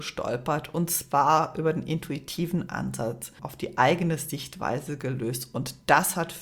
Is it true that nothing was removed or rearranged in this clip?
no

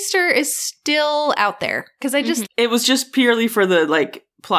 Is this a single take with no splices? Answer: no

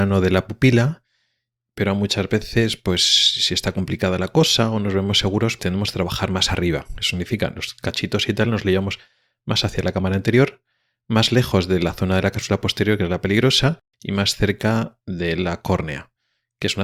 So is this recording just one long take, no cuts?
no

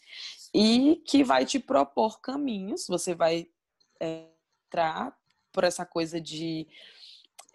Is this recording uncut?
yes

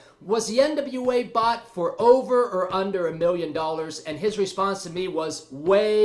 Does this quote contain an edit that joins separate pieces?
no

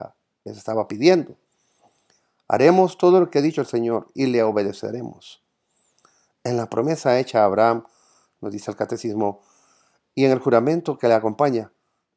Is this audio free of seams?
yes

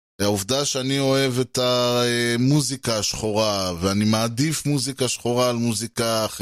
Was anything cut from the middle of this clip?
no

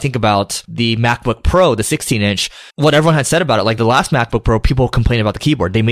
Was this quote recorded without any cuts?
no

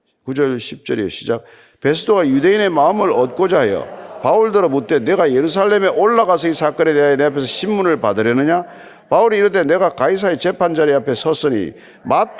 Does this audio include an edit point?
no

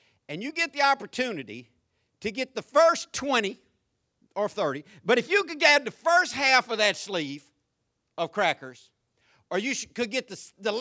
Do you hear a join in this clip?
yes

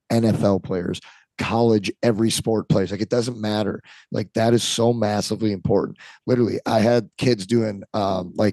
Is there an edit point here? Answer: no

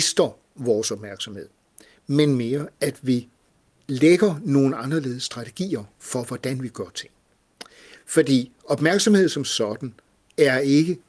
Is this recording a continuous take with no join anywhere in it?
yes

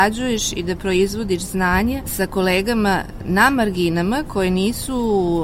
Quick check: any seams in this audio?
no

